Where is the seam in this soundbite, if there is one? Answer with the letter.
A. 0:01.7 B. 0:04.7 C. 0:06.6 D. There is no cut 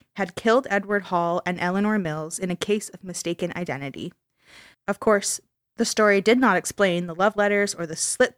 B